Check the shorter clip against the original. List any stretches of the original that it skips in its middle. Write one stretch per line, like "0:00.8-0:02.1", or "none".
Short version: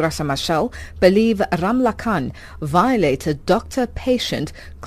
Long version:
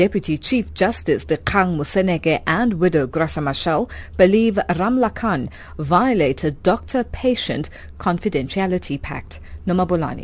none